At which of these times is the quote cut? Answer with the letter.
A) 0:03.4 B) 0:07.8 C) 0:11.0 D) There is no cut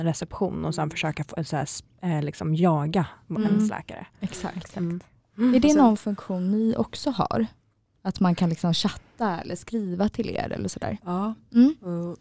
D